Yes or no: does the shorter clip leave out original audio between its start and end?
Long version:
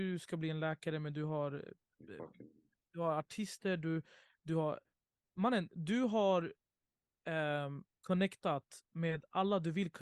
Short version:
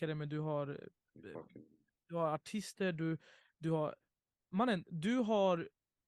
no